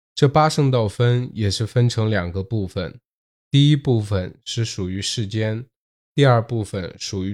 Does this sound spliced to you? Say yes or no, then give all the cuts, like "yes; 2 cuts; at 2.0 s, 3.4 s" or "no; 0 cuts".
no; 0 cuts